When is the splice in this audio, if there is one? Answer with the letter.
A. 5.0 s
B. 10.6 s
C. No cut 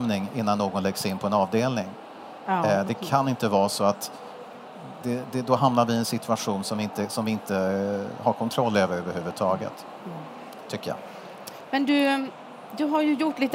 A